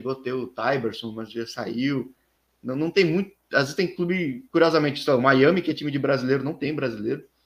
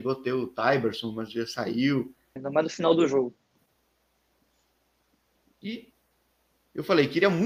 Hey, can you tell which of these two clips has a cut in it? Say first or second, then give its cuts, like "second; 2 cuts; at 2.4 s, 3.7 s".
second; 1 cut; at 2.4 s